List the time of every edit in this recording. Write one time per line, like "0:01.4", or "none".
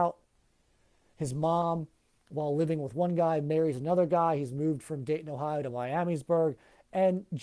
none